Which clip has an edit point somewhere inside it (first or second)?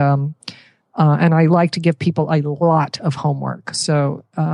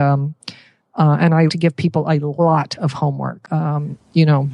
second